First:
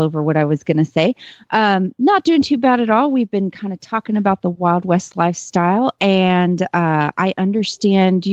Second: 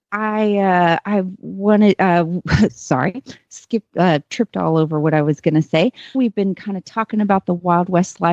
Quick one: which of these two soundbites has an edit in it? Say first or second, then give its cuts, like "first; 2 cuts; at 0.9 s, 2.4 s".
second; 1 cut; at 6.1 s